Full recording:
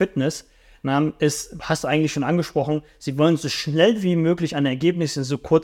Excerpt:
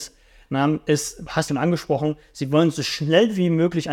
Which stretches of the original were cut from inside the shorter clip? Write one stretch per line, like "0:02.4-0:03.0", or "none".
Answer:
0:01.8-0:02.1